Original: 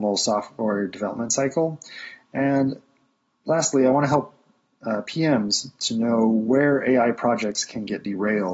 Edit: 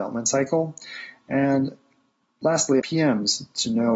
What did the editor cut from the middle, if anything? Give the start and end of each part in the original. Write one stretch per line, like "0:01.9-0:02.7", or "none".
0:03.8-0:05.0

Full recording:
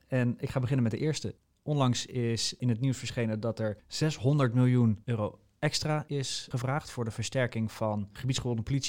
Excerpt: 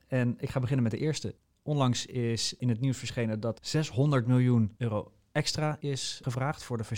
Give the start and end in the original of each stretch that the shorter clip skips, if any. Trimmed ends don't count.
0:03.5-0:03.8

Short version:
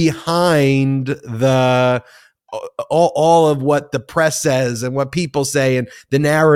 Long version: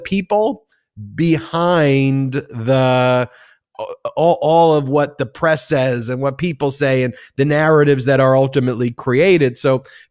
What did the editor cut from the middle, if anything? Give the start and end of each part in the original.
none

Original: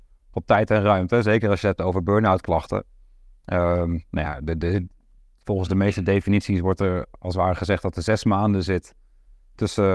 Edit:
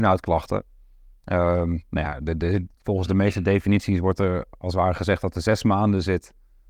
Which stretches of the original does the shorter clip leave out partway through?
0:04.9-0:05.3

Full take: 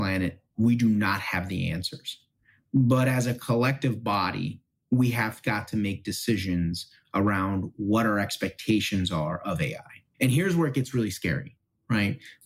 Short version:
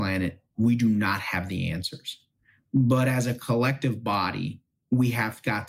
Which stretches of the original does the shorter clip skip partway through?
none

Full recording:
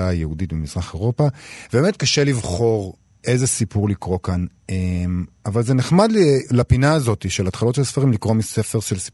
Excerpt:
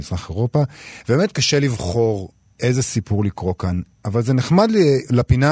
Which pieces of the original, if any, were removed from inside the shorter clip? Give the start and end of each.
0:04.6-0:05.4

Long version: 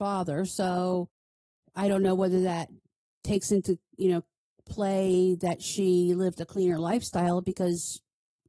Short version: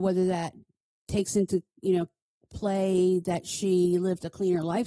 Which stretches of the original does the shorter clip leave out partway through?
none

